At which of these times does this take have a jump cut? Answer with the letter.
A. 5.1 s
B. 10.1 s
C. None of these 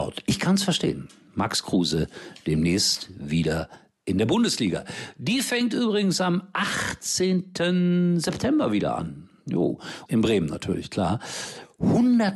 B